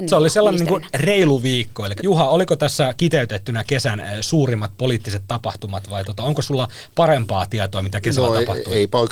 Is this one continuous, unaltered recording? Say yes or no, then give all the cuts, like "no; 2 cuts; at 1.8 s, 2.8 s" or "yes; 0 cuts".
no; 1 cut; at 2.0 s